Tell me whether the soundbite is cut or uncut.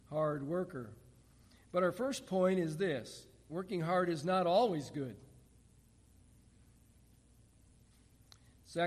uncut